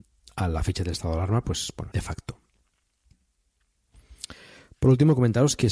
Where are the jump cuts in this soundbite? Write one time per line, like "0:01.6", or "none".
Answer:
0:01.9